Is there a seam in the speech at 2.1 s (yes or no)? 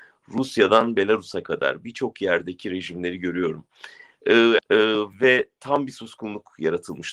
no